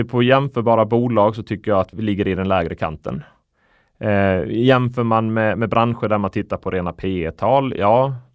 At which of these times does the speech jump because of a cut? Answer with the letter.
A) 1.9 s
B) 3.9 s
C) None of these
A